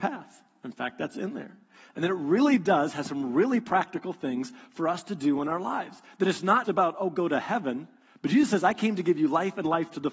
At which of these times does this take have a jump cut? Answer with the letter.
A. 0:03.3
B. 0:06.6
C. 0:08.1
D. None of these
B